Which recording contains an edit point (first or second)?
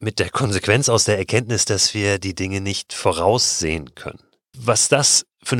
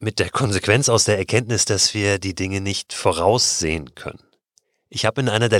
first